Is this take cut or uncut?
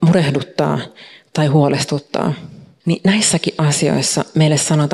cut